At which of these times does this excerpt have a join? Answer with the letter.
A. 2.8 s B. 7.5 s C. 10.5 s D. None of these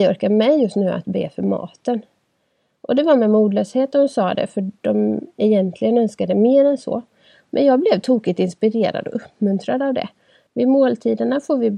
C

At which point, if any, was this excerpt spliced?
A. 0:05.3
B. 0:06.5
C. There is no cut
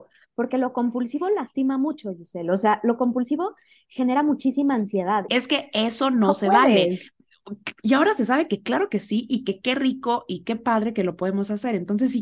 A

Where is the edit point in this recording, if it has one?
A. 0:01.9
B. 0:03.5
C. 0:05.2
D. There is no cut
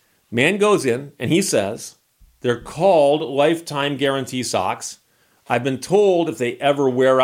D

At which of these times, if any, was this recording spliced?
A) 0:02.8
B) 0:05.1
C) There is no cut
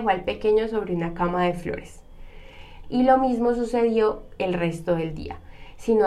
A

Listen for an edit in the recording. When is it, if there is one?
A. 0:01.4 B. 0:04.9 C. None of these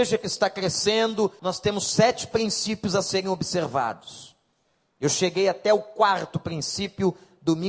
A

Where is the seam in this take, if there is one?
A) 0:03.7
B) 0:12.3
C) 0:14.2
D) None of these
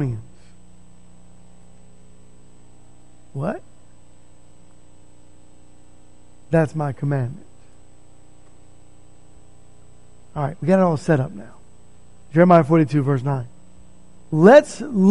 C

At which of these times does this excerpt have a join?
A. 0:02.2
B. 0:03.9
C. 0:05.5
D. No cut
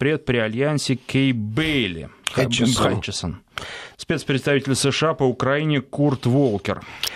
B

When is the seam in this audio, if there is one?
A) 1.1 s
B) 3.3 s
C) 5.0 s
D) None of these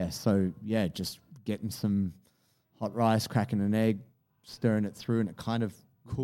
D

